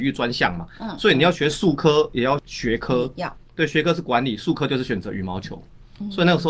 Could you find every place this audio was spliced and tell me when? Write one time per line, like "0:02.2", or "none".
0:02.4

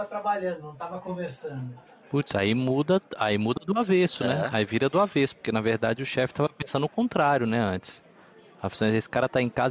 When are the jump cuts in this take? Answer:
none

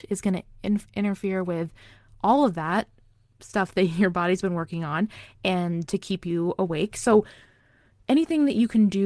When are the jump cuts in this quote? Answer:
none

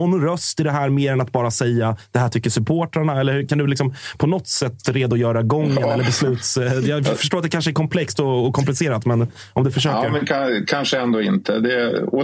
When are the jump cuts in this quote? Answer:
none

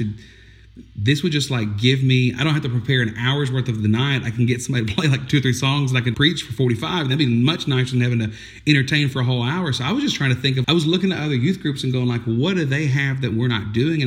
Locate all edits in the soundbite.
0:06.1
0:10.6

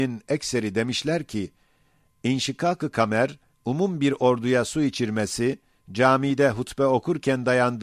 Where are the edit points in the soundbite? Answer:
0:03.5

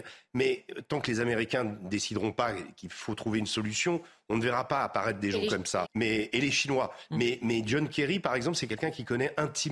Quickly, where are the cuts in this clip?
0:05.9

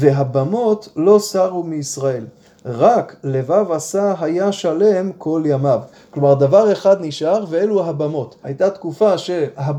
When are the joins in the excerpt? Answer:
0:08.4

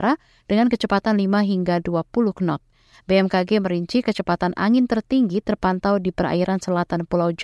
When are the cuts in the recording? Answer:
none

